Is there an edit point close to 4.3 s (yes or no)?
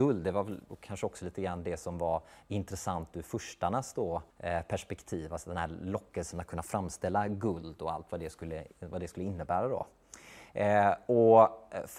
yes